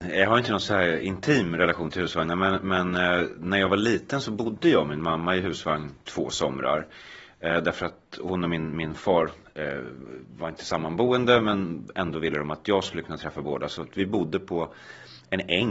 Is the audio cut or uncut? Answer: uncut